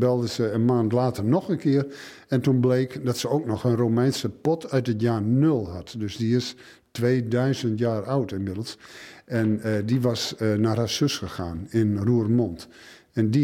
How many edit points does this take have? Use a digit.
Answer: 0